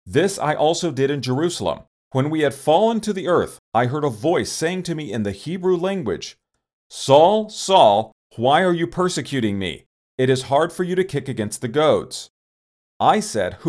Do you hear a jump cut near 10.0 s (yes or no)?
no